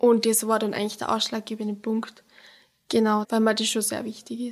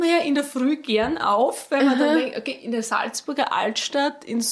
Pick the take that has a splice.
first; 1 cut; at 3.2 s

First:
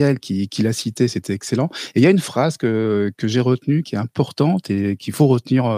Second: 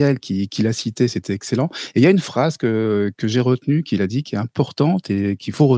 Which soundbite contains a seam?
first; 1 cut; at 3.8 s

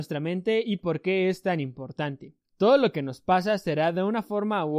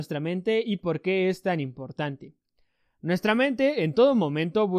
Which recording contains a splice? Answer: first; 1 cut; at 2.5 s

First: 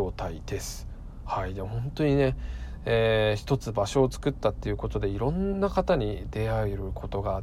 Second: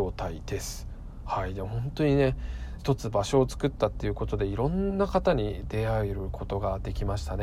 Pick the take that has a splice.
second; 1 cut; at 2.8 s

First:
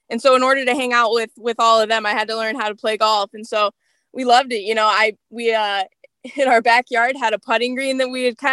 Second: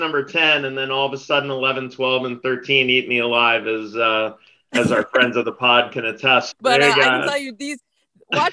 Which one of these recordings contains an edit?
second; 1 cut; at 6.5 s

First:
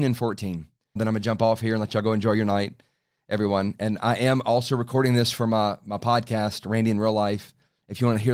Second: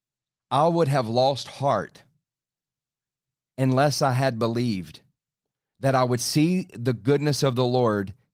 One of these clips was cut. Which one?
first; 1 cut; at 1.0 s

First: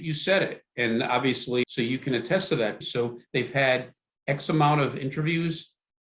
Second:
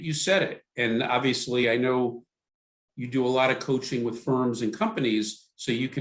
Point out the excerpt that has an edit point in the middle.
first; 2 cuts; at 1.6 s, 2.8 s

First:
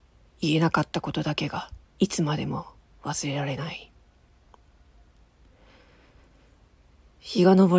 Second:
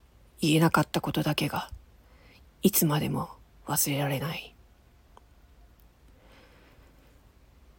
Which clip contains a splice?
first; 1 cut; at 1.9 s

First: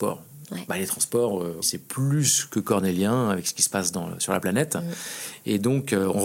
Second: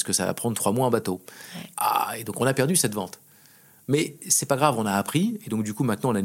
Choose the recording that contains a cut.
first; 1 cut; at 1.6 s

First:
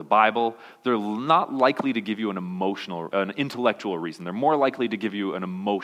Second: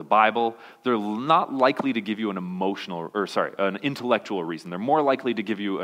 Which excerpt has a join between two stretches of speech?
first; 1 cut; at 3.1 s

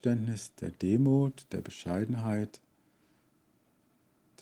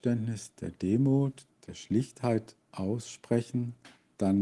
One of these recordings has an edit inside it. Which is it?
second; 2 cuts; at 1.5 s, 2.6 s

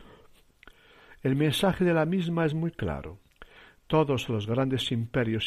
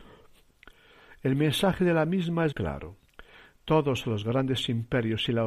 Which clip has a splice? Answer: second; 1 cut; at 2.5 s

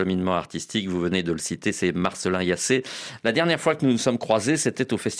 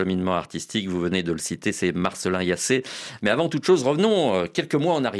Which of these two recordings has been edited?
first; 1 cut; at 3.2 s

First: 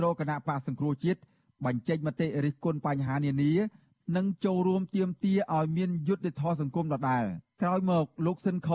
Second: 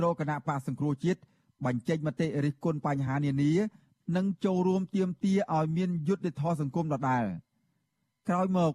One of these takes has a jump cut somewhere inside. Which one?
first; 1 cut; at 7.5 s

